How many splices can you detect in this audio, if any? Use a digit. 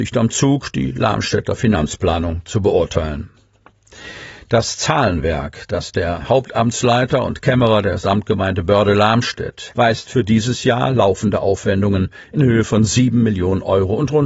1